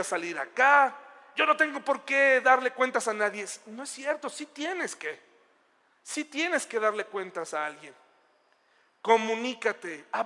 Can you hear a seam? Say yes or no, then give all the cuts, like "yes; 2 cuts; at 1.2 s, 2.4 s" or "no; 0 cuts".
no; 0 cuts